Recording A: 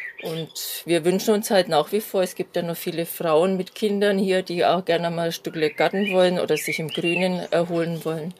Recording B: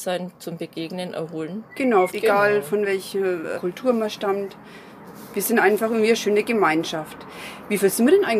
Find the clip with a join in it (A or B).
B